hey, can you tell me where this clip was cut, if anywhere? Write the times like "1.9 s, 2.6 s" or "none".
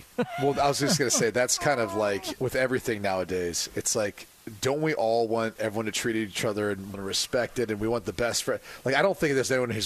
5.6 s, 6.9 s